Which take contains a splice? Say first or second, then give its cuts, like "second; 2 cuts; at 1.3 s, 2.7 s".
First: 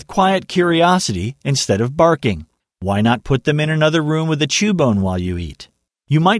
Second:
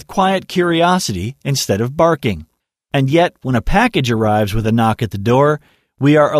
first; 1 cut; at 2.6 s